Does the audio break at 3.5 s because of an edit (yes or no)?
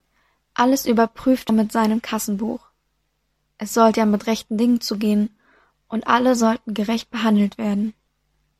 no